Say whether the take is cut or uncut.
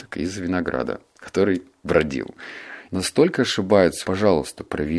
cut